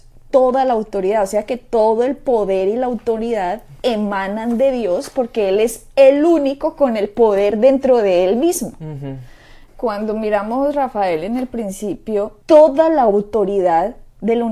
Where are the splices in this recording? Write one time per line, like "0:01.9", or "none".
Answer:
0:09.7
0:12.4